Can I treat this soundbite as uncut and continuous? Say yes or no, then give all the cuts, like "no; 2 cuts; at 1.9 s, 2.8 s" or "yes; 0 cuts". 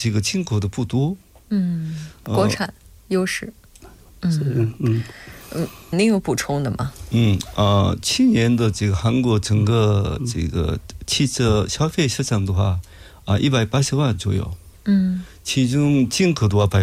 no; 2 cuts; at 3.8 s, 5.9 s